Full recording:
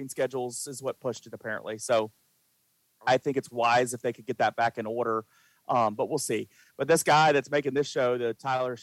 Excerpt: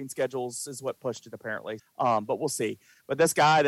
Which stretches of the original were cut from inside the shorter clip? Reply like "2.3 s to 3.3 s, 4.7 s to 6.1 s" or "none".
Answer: 1.8 s to 5.5 s